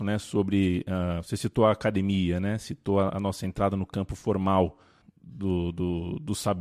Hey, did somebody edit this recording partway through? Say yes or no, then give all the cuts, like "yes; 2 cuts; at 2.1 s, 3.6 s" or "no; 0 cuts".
yes; 2 cuts; at 3.1 s, 5.0 s